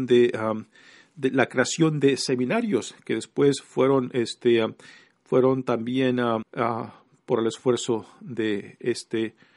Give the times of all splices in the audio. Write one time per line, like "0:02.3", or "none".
0:06.4